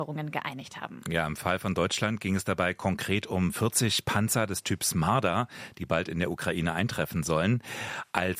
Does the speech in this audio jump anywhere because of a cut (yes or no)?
no